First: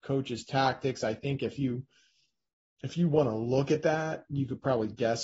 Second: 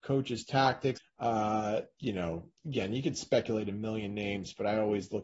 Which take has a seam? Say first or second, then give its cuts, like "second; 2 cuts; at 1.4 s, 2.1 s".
second; 2 cuts; at 1.0 s, 2.6 s